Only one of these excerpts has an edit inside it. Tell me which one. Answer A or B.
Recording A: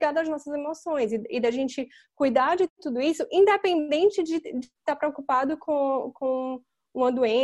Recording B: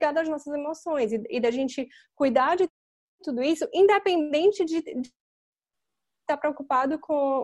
A